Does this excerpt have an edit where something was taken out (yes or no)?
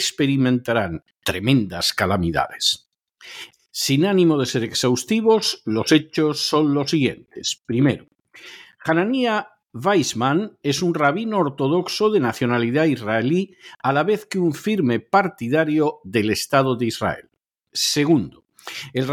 yes